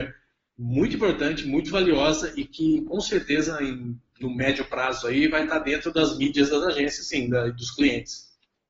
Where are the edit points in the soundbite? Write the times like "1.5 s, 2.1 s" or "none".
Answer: none

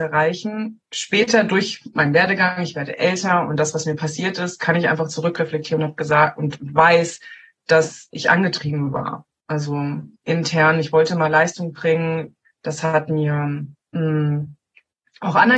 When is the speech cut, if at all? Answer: 10.2 s, 12.4 s

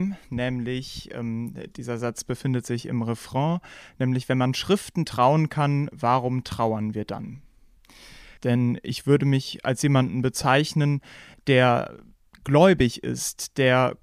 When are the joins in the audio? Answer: 8.4 s, 11.3 s

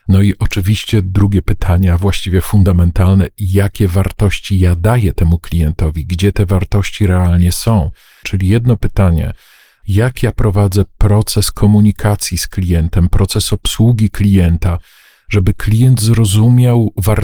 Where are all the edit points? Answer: 8.2 s

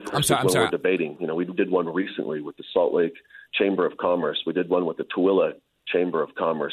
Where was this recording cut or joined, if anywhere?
1.2 s

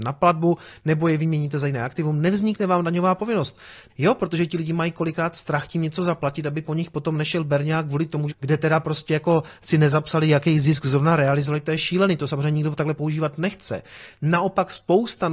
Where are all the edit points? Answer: 3.9 s, 8.3 s

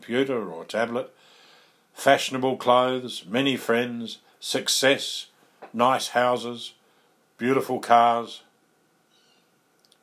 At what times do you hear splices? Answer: none

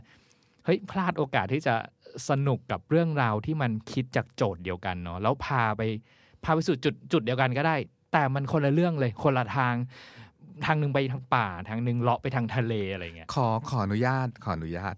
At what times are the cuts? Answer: none

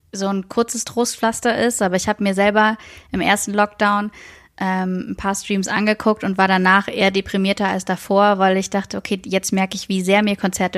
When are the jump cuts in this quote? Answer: none

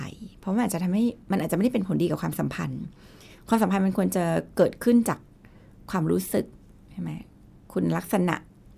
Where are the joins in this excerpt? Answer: none

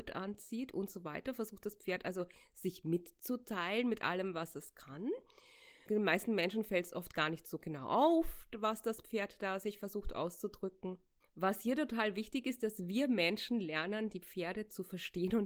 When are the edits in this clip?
5.9 s, 11.2 s

